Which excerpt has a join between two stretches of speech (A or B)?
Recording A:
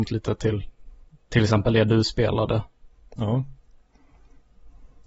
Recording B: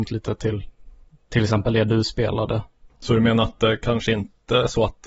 B